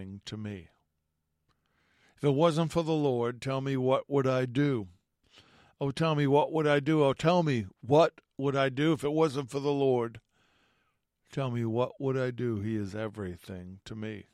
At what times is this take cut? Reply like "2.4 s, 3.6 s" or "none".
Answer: none